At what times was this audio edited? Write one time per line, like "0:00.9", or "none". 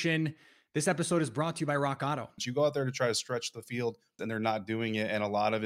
0:02.4
0:04.2

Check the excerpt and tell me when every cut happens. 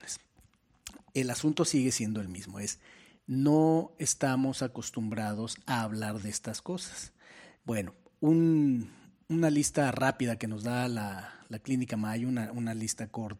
0:07.6

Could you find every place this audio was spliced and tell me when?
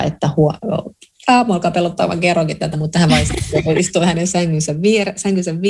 none

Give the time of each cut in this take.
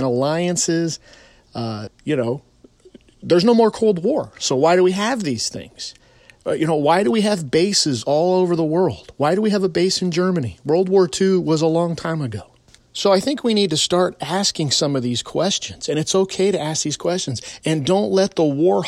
0:01.9

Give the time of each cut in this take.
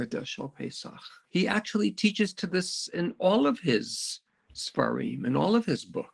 0:01.3

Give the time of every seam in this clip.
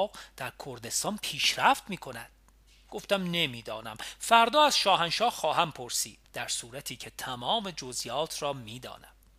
0:06.2

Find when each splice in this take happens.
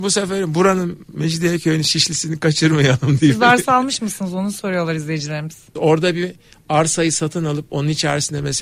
0:05.8

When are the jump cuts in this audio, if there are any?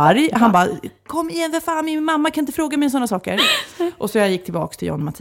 none

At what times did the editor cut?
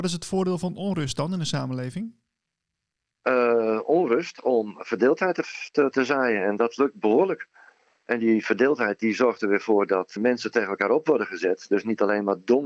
0:05.9
0:10.2

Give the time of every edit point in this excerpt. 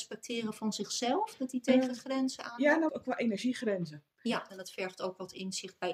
0:02.9
0:04.5

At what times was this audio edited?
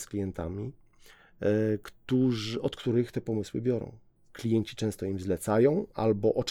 none

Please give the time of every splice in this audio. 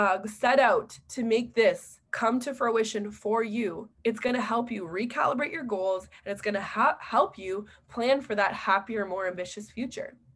0:02.1
0:04.0

